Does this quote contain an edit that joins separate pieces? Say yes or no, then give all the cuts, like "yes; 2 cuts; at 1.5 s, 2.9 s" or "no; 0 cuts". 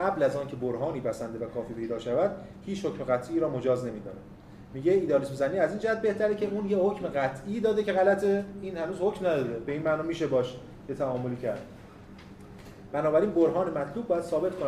no; 0 cuts